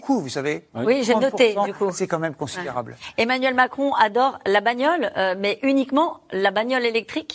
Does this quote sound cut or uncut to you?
uncut